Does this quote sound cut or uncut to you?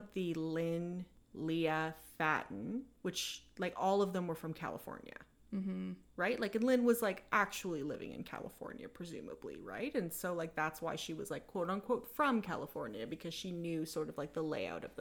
uncut